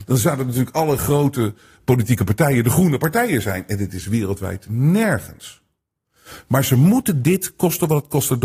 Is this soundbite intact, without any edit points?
yes; 0 cuts

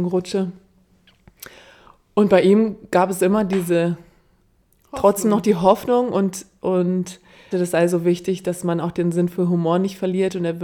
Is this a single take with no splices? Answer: no; 1 cut; at 7.5 s

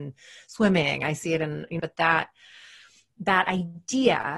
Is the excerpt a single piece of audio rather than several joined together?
no; 1 cut; at 1.8 s

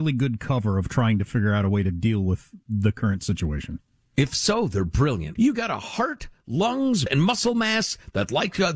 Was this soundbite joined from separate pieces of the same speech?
yes; 2 cuts; at 5.4 s, 7.1 s

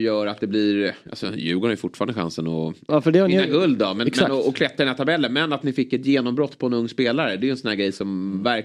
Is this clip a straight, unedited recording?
no; 1 cut; at 2.9 s

